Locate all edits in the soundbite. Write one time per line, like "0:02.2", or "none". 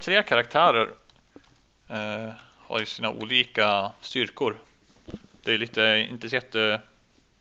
none